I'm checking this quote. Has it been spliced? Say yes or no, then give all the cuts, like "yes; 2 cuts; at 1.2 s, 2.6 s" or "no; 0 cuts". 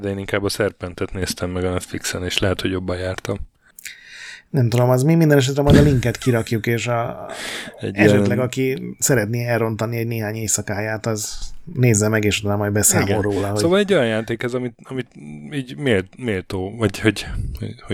no; 0 cuts